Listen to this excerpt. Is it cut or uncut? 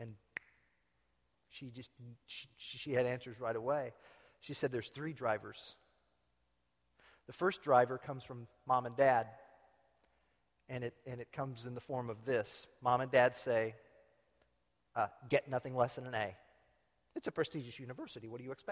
uncut